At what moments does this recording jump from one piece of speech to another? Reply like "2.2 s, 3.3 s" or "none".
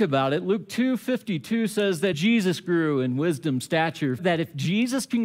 2.1 s, 4.2 s